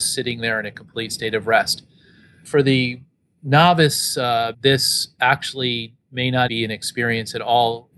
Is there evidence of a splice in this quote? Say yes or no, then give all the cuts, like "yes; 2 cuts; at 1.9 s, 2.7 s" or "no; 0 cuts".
yes; 2 cuts; at 4.5 s, 6.5 s